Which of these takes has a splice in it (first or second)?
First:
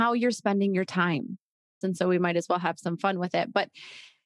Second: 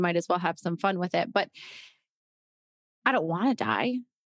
first